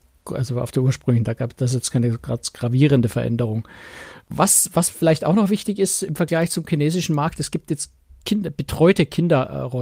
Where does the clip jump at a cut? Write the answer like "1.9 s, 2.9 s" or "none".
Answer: none